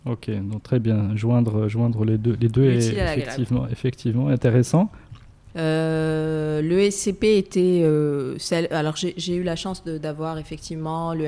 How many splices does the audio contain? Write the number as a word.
one